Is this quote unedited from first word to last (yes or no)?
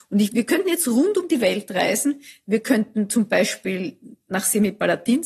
yes